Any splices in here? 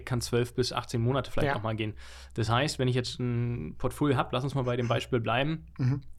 no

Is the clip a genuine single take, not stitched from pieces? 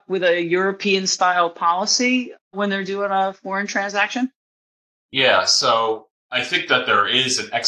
yes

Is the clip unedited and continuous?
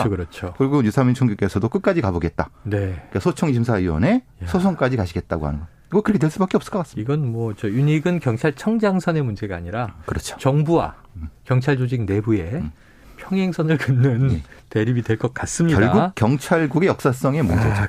yes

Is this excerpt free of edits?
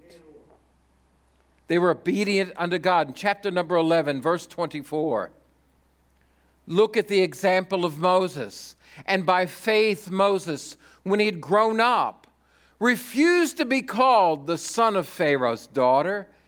yes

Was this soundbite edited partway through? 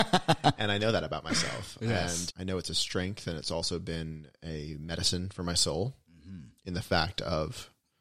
no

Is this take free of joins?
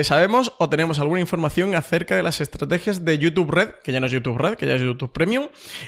yes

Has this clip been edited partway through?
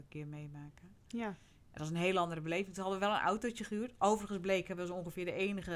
no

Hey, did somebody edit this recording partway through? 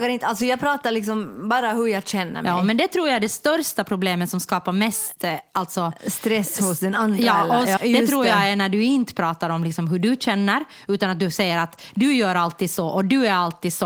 yes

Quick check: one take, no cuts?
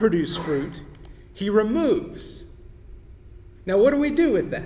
yes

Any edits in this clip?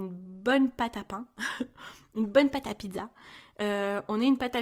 no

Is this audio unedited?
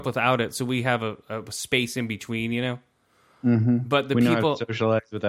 yes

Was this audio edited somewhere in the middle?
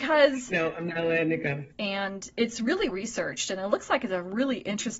yes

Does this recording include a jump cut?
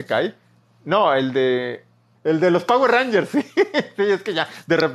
yes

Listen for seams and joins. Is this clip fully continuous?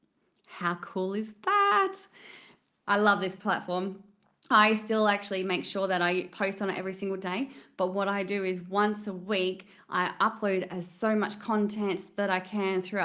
yes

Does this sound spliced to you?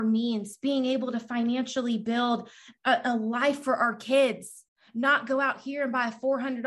no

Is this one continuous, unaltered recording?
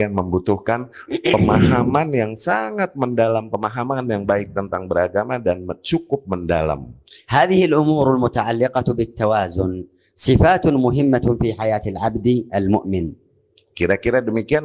yes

